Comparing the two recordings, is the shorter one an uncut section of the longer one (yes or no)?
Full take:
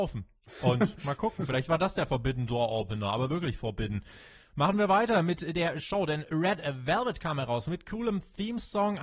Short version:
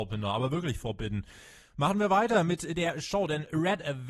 yes